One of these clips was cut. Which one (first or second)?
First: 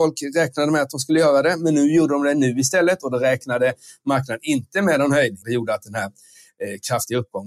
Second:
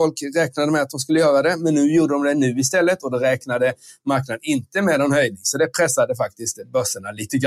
first